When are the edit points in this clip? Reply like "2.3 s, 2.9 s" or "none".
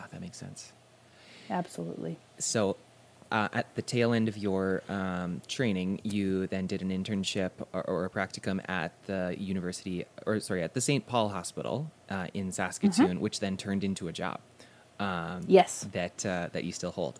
10.2 s